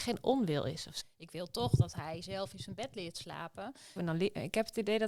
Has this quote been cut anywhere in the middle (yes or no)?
yes